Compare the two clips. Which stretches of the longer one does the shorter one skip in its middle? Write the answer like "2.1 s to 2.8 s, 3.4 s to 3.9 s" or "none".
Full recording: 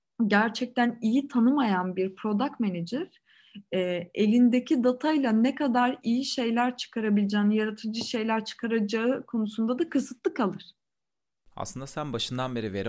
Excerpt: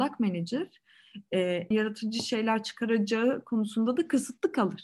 4.1 s to 7.5 s